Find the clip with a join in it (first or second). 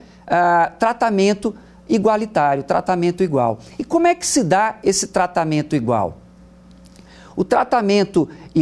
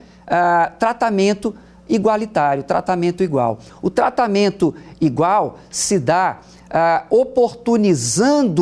second